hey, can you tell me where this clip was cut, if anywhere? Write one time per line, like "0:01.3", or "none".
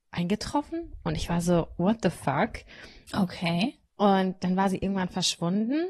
0:03.9